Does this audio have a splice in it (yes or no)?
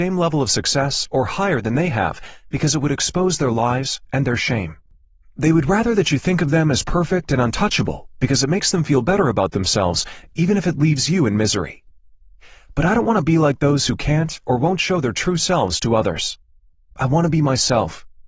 yes